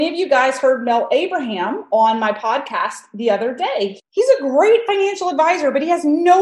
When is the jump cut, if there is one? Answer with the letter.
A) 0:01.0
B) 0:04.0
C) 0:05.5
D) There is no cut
B